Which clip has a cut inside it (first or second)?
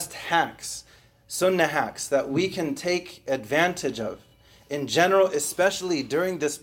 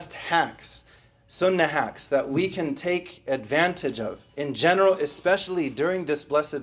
second